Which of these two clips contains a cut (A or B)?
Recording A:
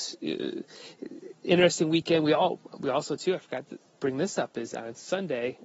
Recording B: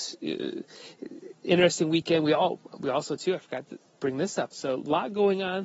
B